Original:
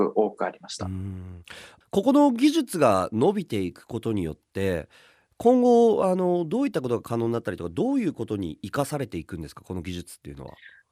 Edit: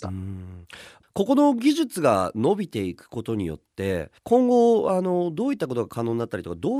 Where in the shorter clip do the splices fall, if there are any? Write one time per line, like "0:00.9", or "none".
0:04.2